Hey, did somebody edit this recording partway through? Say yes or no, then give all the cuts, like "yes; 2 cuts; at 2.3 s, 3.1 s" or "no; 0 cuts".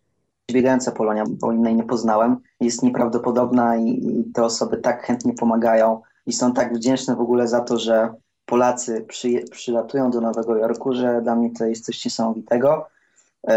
yes; 1 cut; at 1.3 s